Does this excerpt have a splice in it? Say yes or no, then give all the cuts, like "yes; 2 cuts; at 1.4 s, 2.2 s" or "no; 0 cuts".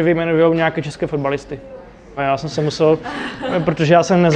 yes; 1 cut; at 2.2 s